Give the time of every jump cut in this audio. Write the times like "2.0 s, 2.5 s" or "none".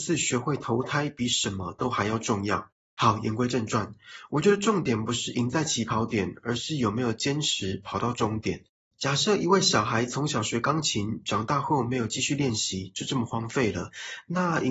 none